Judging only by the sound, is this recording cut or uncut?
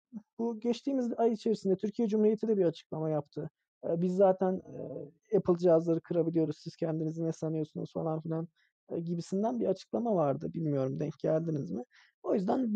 uncut